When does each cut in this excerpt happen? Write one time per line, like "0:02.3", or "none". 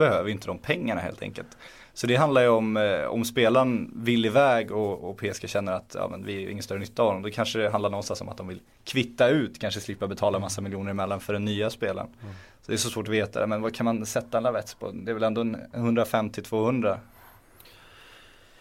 none